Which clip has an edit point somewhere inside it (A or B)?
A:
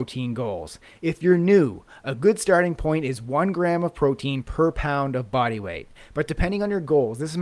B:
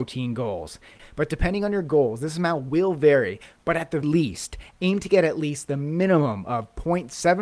B